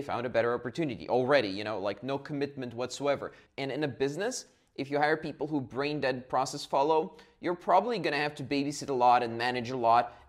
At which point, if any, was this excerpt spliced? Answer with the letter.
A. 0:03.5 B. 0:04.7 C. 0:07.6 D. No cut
A